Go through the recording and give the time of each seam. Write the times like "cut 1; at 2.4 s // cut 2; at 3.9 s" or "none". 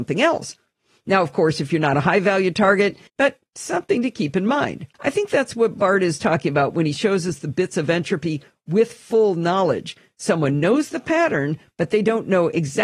cut 1; at 3.1 s // cut 2; at 4.9 s